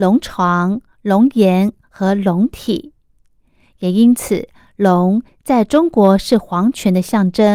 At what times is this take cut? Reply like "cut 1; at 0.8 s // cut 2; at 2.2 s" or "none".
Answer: none